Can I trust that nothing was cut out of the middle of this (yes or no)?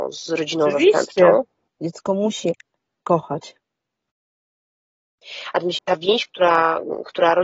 no